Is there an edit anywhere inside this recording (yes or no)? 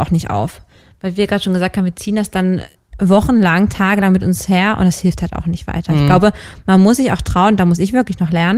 no